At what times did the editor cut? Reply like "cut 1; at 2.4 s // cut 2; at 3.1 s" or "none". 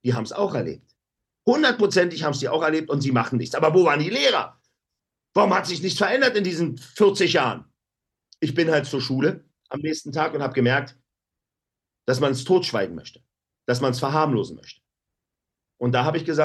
none